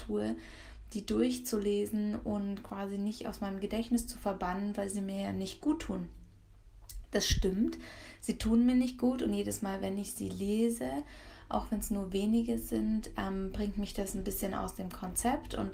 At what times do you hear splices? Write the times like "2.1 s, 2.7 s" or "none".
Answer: none